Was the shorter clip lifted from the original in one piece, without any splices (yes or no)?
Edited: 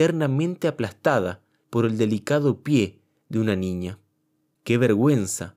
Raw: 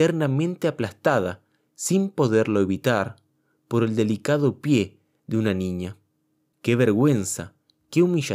no